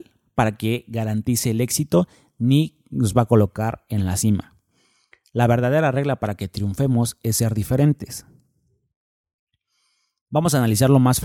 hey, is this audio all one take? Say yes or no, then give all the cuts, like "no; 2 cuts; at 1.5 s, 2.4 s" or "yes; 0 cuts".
yes; 0 cuts